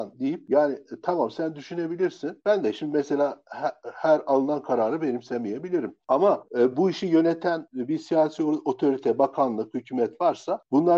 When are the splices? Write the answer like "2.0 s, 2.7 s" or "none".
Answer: none